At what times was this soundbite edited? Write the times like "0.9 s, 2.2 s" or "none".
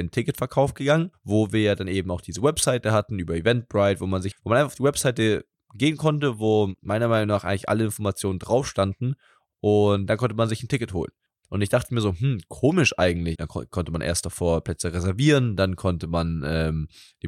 4.3 s, 11.4 s, 13.3 s